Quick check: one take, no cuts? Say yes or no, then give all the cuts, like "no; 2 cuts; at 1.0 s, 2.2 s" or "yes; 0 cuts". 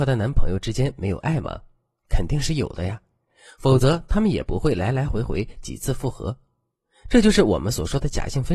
yes; 0 cuts